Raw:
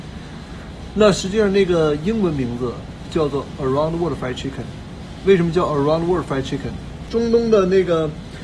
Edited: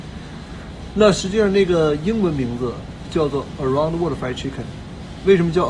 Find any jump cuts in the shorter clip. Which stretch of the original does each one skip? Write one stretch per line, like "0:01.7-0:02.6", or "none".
none